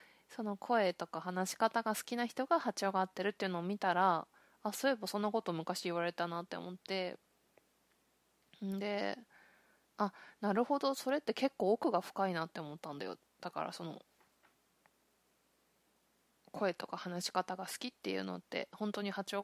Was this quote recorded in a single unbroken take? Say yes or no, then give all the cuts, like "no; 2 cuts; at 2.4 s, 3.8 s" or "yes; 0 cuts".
yes; 0 cuts